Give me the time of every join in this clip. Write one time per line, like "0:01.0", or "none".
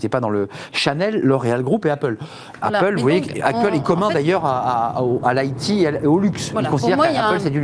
none